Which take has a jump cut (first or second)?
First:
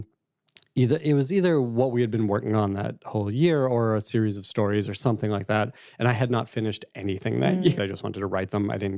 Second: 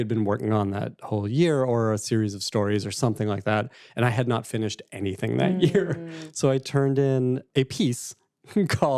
first